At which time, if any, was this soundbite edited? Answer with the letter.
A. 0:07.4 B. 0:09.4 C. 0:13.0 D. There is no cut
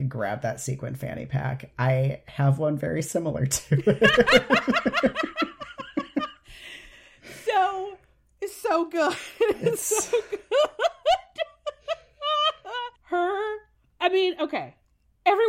C